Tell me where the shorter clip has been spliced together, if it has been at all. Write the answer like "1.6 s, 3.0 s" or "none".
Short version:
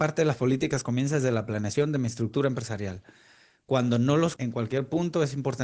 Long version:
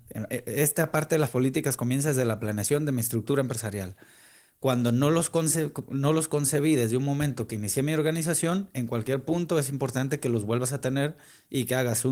4.4 s